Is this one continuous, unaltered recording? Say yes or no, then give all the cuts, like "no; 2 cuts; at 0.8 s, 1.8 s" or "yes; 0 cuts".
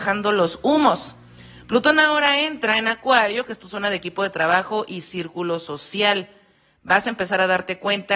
yes; 0 cuts